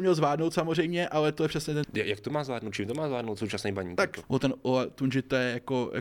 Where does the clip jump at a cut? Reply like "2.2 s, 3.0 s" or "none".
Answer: 1.8 s, 4.2 s

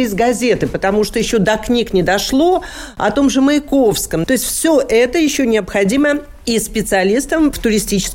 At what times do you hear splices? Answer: 4.3 s

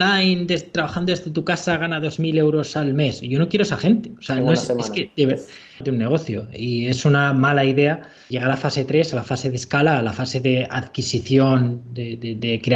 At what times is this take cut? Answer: 5.8 s, 8.3 s

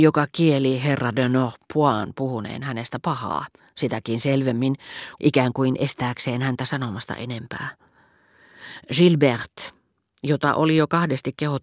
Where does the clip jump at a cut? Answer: 5.2 s

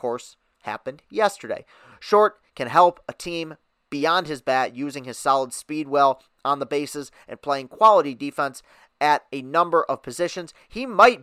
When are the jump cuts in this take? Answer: 1.9 s

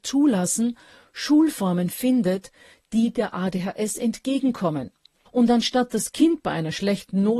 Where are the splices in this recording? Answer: 5.3 s

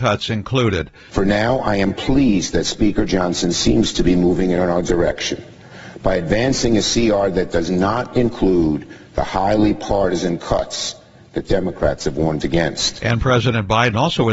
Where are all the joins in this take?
1.1 s

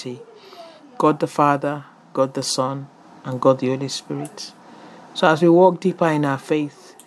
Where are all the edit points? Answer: none

